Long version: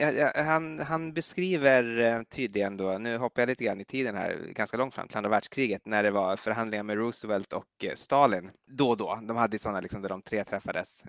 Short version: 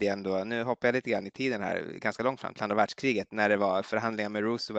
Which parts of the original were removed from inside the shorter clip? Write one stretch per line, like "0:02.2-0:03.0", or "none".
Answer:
none